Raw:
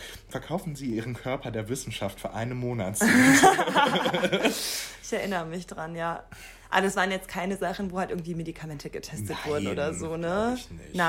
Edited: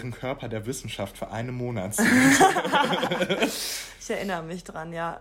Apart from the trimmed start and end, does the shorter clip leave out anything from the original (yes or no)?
no